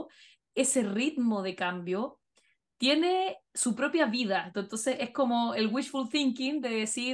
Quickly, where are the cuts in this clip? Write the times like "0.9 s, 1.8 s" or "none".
4.5 s